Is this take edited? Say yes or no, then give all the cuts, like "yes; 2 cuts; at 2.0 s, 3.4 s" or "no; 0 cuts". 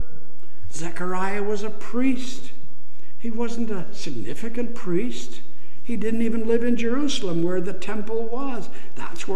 no; 0 cuts